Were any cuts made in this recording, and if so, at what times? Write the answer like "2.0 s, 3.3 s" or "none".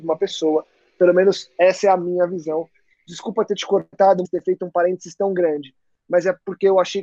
4.2 s